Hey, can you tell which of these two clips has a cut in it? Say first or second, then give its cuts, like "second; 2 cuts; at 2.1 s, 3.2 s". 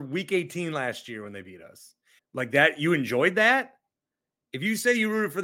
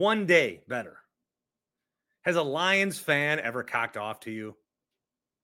first; 1 cut; at 2.2 s